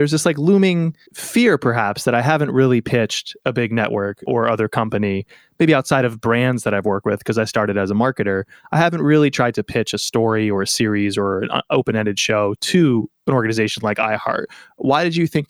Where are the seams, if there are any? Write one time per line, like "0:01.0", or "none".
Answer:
0:01.0